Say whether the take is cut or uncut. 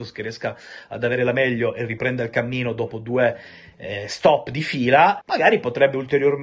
cut